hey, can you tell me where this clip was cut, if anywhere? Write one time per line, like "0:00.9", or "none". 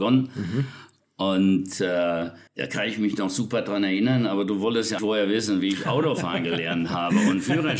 0:02.5
0:05.0